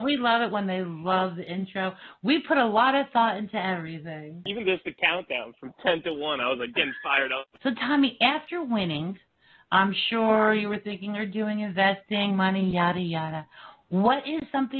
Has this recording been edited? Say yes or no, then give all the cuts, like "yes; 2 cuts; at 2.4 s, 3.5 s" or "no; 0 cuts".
no; 0 cuts